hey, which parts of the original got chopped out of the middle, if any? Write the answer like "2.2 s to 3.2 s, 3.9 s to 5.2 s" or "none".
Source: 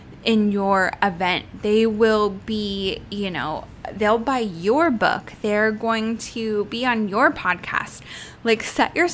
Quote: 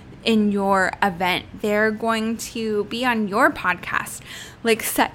1.6 s to 5.4 s